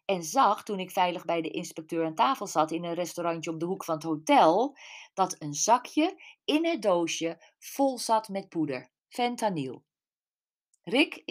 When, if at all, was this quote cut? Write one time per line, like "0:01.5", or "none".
0:09.0